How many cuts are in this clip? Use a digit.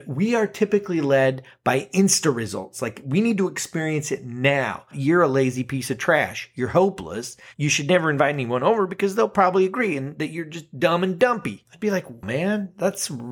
2